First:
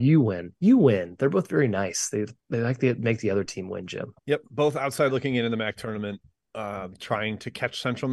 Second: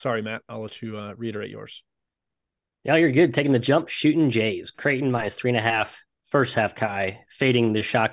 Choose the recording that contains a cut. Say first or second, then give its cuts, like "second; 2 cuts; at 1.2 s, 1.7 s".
first; 1 cut; at 4.2 s